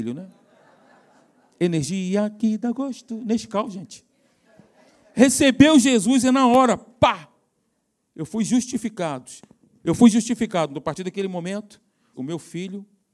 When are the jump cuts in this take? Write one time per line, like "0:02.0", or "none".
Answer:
0:12.1